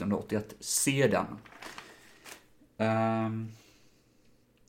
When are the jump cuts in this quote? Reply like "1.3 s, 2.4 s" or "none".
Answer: none